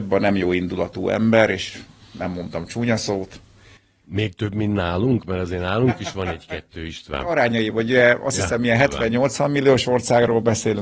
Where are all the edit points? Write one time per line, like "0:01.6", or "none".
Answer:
none